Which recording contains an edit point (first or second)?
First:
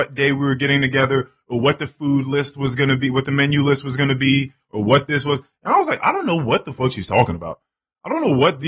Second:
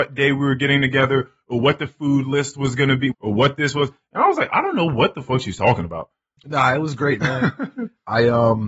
second